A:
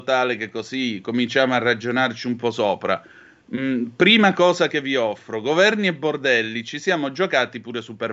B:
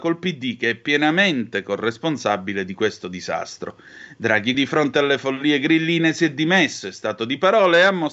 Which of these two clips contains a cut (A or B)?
B